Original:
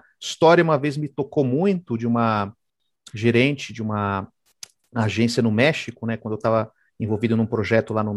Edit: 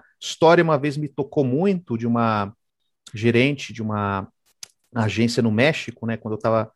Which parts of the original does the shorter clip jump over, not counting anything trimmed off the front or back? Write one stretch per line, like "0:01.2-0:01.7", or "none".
none